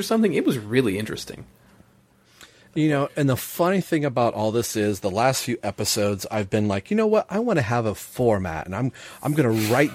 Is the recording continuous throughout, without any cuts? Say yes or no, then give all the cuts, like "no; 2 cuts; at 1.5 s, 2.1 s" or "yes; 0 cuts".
yes; 0 cuts